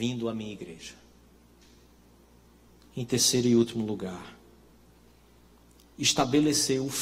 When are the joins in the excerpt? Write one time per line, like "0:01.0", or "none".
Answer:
0:02.8